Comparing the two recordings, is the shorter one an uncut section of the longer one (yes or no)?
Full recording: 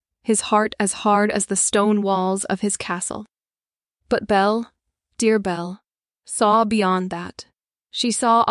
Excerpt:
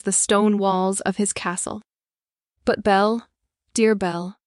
yes